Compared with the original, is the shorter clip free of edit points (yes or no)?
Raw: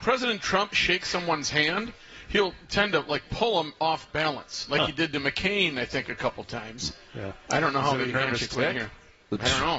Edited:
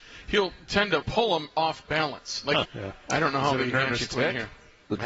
no